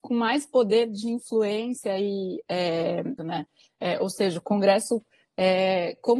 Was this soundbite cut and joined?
yes; 1 cut; at 3.2 s

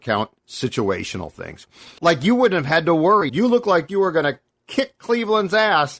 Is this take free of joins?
no; 2 cuts; at 2.0 s, 3.3 s

